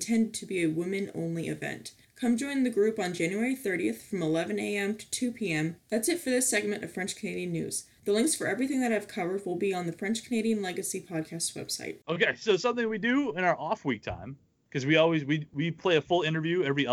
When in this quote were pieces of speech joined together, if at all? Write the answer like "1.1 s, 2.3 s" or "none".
5.8 s, 12.0 s